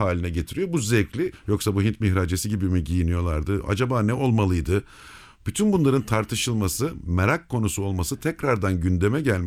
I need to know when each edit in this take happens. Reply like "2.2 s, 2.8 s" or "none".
1.3 s